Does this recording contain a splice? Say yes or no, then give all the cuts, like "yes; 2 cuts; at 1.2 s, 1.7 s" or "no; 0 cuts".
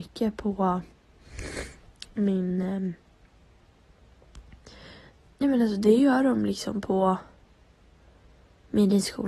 no; 0 cuts